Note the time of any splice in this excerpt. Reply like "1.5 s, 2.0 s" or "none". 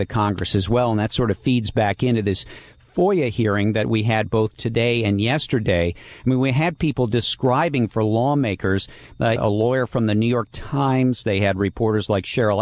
9.4 s